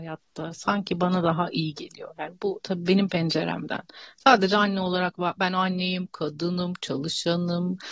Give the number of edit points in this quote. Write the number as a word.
zero